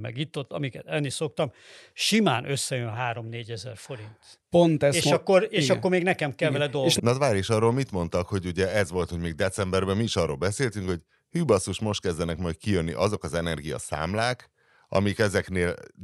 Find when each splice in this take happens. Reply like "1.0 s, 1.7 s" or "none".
7.0 s